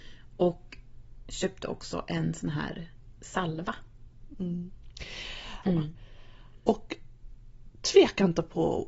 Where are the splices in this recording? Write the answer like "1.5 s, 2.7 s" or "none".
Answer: 5.6 s